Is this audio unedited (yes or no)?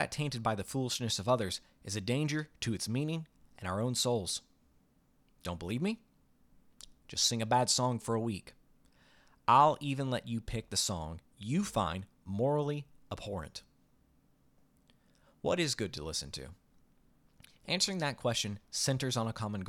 yes